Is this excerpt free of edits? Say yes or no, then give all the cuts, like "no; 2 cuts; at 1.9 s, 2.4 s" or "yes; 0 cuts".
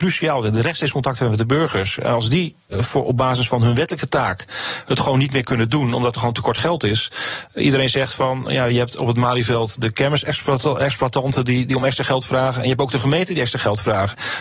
no; 1 cut; at 2.7 s